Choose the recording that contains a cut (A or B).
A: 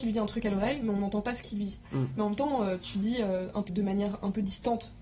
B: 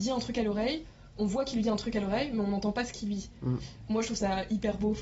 A